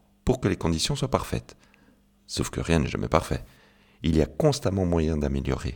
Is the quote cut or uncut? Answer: uncut